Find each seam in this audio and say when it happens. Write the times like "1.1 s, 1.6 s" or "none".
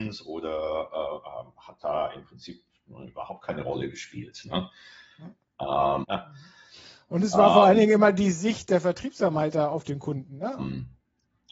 6.0 s, 10.6 s